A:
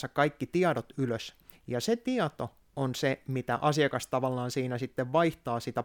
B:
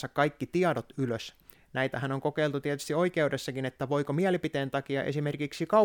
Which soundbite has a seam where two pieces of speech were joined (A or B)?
B